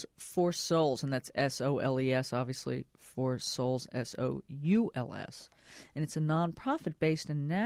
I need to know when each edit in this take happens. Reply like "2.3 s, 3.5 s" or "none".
none